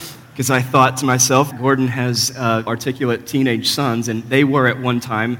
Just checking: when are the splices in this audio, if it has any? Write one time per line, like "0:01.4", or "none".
0:01.5
0:02.7